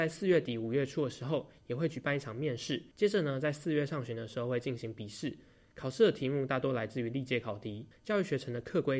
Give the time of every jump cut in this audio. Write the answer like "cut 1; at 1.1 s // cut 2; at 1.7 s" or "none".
cut 1; at 2.9 s // cut 2; at 7.9 s